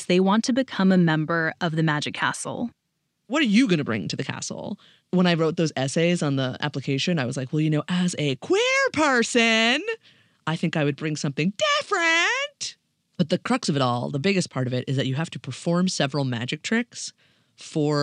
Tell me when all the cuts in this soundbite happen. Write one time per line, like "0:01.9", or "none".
0:03.2